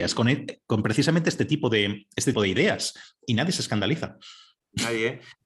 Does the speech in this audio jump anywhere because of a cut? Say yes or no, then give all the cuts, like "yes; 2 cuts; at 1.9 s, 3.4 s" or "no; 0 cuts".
yes; 1 cut; at 2.3 s